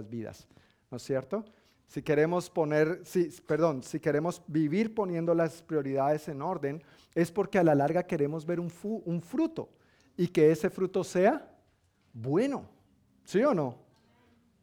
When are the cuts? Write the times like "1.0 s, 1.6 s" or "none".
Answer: 1.7 s